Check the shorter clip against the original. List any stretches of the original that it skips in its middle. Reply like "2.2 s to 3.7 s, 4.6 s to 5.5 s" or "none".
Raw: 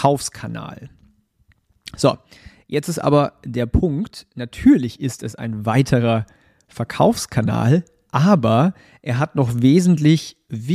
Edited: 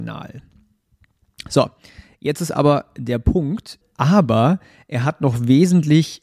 4.3 s to 8.0 s